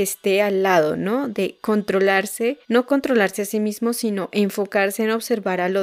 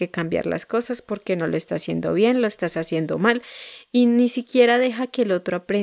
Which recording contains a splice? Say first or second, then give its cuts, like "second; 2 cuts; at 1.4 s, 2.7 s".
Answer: first; 1 cut; at 2.6 s